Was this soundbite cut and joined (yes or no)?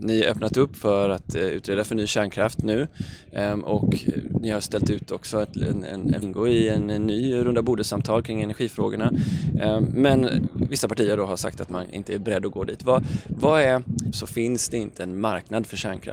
yes